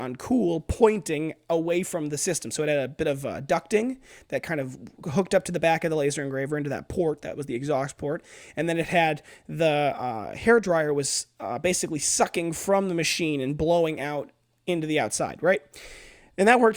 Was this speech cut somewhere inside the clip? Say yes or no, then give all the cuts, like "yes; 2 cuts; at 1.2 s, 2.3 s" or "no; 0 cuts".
no; 0 cuts